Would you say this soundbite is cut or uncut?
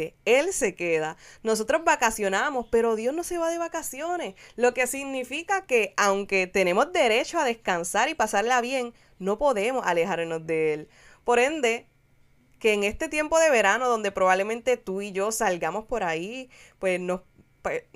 uncut